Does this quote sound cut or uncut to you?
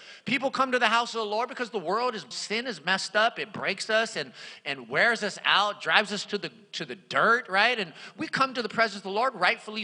cut